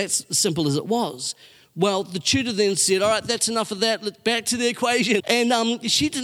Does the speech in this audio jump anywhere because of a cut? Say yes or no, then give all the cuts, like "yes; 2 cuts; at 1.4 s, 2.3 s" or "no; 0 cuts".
yes; 1 cut; at 5.2 s